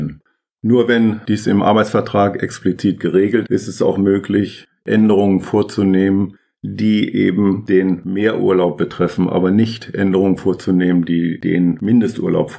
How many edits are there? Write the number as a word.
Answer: one